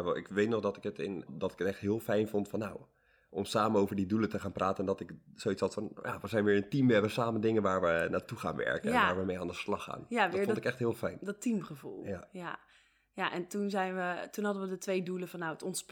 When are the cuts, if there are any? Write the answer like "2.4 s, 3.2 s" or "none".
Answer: 1.3 s